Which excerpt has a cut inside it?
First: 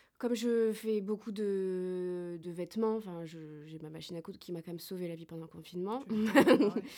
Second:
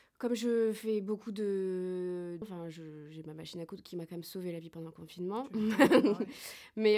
second; 1 cut; at 2.4 s

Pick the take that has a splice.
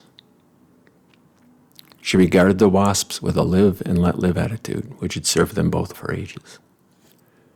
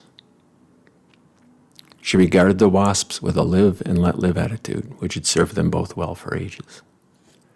first; 1 cut; at 5.9 s

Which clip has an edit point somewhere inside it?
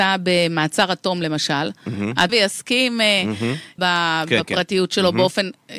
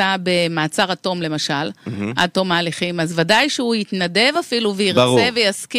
first; 2 cuts; at 2.3 s, 3.8 s

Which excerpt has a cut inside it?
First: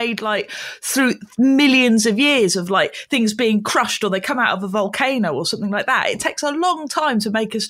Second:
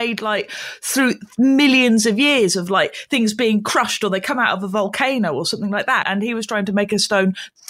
second; 1 cut; at 6.0 s

